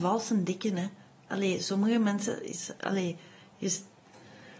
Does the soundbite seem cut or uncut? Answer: uncut